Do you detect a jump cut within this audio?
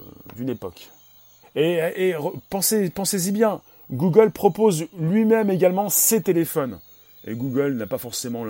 yes; 1 cut; at 1.4 s

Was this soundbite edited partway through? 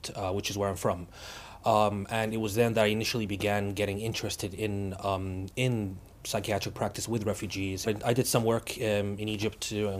yes; 2 cuts; at 6.2 s, 7.9 s

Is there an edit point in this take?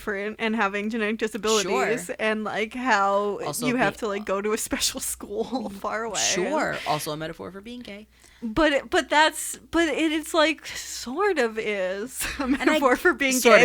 no; 0 cuts

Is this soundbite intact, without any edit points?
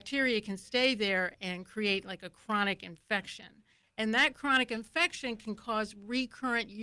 yes; 0 cuts

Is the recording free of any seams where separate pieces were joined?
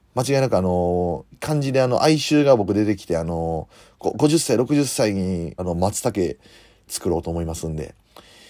no; 2 cuts; at 1.3 s, 5.6 s

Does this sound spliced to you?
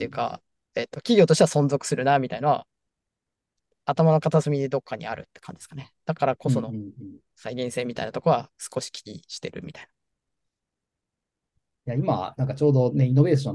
no; 0 cuts

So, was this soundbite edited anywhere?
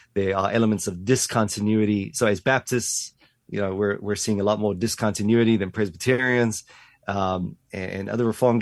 no; 0 cuts

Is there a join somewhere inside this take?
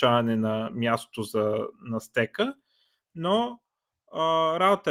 no; 0 cuts

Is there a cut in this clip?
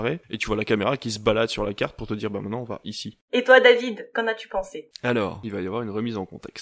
yes; 2 cuts; at 4.1 s, 5.4 s

